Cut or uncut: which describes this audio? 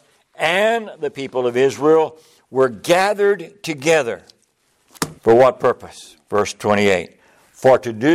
cut